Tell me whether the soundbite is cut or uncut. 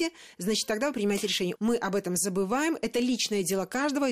cut